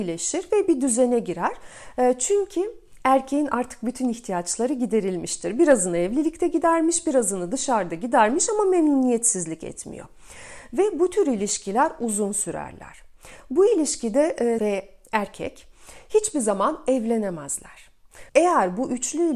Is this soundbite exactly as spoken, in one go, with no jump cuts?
no; 2 cuts; at 14.6 s, 18.3 s

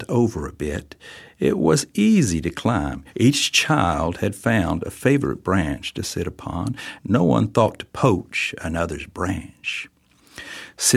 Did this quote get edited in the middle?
yes; 2 cuts; at 3.1 s, 7.0 s

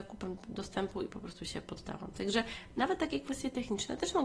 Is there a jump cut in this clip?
no; 0 cuts

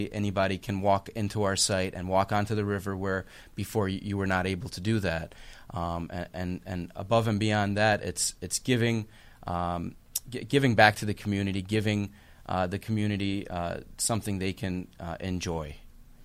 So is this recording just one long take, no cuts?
yes; 0 cuts

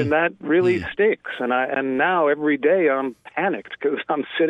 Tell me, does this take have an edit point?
no; 0 cuts

